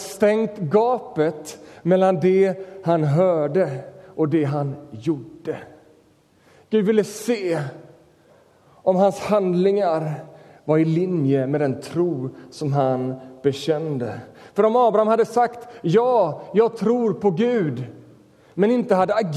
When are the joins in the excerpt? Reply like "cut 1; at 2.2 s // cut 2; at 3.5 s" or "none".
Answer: none

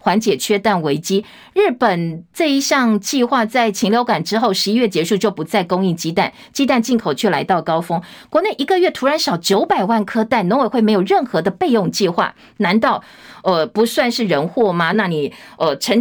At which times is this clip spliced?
cut 1; at 14.9 s

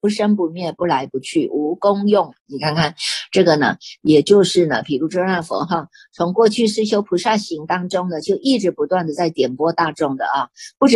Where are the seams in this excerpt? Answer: cut 1; at 2.3 s

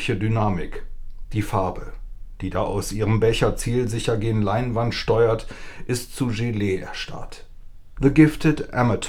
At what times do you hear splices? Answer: cut 1; at 8.0 s

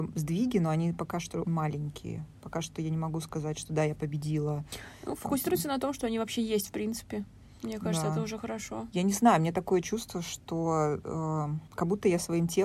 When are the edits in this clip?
cut 1; at 1.4 s

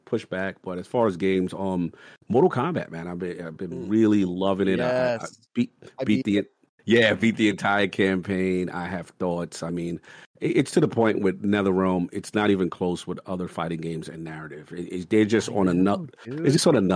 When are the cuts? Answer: none

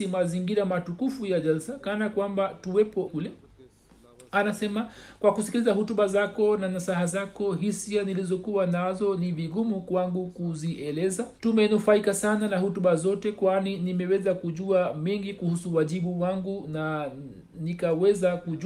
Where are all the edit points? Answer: cut 1; at 3.1 s // cut 2; at 11.4 s

